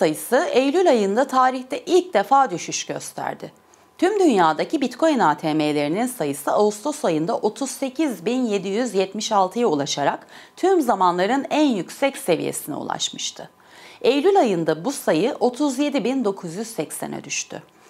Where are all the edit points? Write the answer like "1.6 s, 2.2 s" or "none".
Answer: none